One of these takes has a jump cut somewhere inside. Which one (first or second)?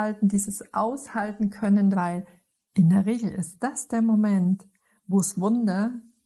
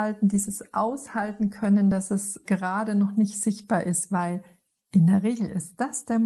first